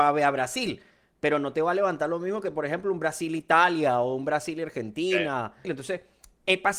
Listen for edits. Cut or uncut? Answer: cut